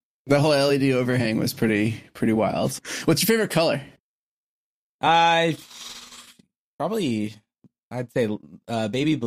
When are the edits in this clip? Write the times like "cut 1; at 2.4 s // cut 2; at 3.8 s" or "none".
cut 1; at 2.8 s

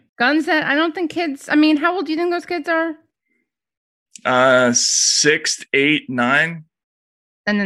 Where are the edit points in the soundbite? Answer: none

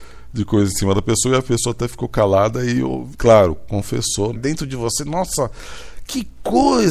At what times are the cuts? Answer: cut 1; at 3.1 s // cut 2; at 4.3 s

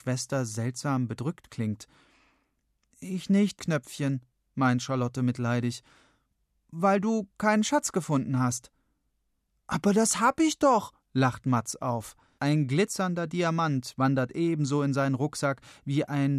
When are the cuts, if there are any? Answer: cut 1; at 3.6 s // cut 2; at 12.4 s

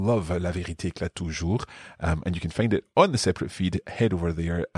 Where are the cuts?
none

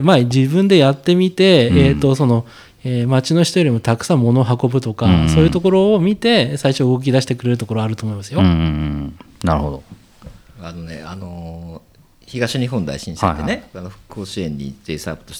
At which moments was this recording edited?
none

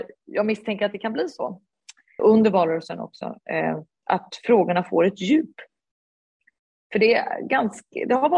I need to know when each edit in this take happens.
cut 1; at 2.2 s // cut 2; at 4.0 s

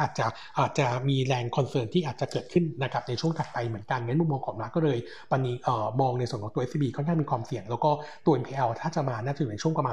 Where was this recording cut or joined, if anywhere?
none

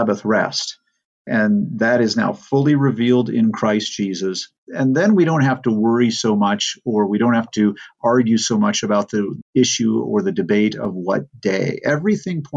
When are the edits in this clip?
cut 1; at 4.6 s

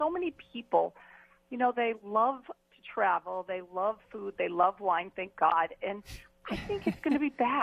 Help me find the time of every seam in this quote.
none

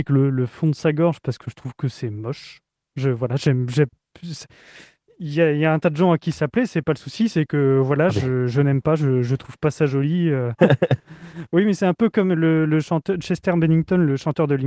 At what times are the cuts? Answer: cut 1; at 10.6 s

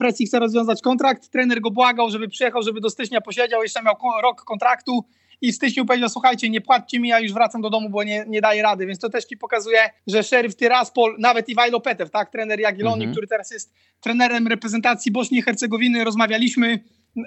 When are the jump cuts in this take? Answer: cut 1; at 10.0 s

